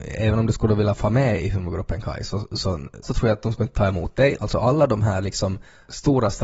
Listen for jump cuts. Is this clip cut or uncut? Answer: cut